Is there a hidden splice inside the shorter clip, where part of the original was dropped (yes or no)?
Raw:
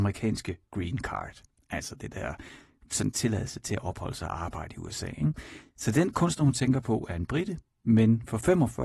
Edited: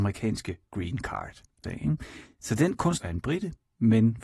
yes